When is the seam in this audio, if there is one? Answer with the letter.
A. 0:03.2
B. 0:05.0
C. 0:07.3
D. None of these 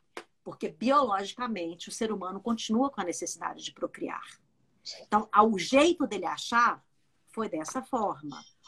D